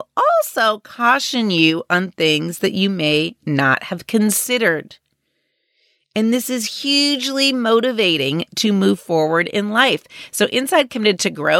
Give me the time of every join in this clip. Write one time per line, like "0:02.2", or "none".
none